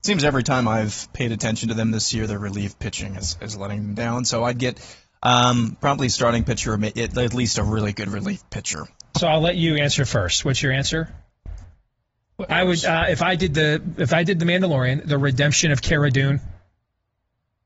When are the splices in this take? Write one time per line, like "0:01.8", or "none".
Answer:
0:08.9
0:12.5